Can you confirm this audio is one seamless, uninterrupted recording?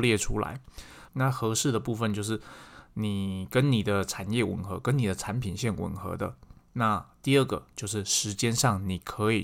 no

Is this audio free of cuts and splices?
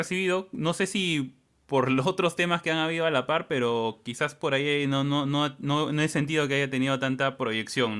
yes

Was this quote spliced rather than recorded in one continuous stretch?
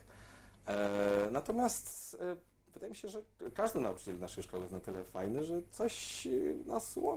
no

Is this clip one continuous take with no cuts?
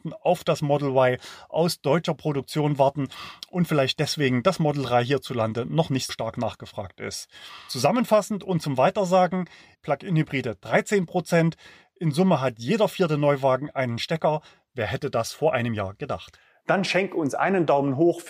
no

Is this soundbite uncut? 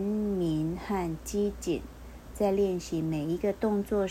yes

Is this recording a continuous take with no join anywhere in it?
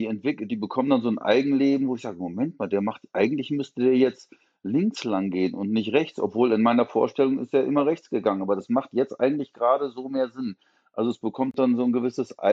yes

